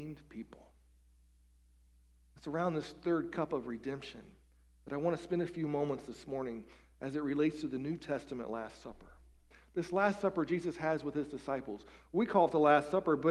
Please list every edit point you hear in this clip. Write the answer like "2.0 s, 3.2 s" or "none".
none

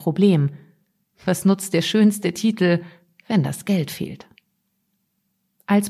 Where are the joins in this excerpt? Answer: none

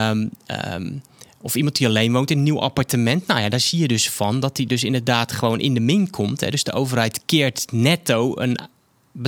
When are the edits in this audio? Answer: none

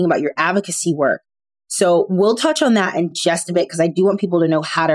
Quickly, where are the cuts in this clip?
none

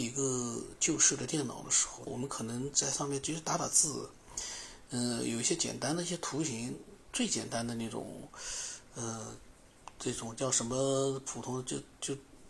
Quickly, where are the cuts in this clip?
2.1 s

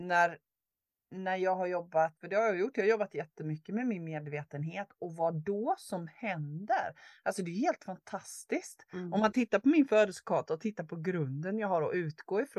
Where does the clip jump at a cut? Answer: 2.2 s

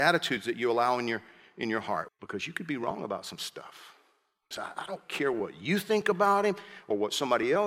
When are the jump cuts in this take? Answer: 2.1 s, 4.5 s

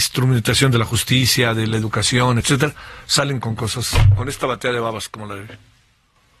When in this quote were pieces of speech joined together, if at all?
none

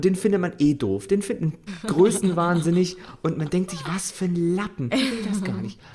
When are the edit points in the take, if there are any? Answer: 1.7 s, 4.9 s

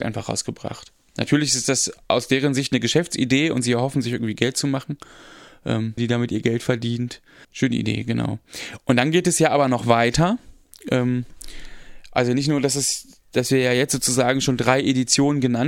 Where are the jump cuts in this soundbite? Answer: 6.0 s, 7.4 s

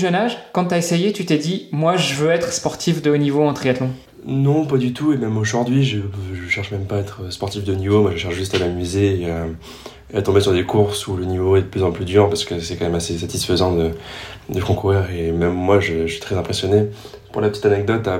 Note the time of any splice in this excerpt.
none

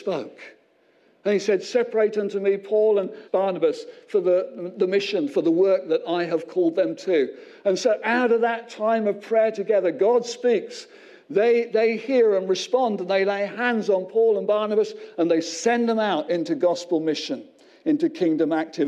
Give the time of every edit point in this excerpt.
3.3 s

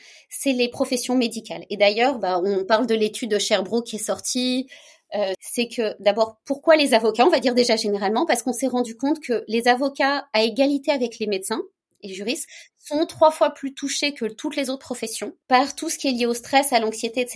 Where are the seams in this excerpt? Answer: 5.3 s, 15.4 s

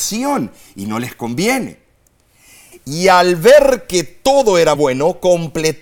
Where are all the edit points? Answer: 2.7 s, 4.8 s

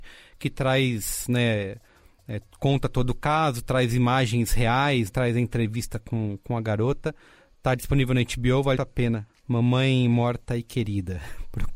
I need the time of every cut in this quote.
5.1 s, 8.8 s

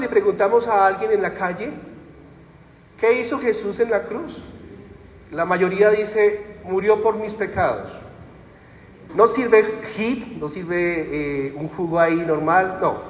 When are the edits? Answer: 9.1 s

